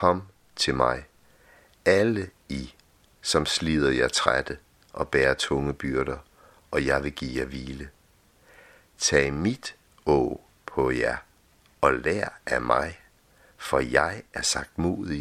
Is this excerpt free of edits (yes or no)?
yes